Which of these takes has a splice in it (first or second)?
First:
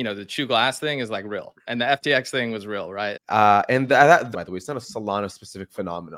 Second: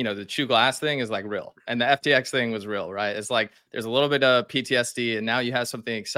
first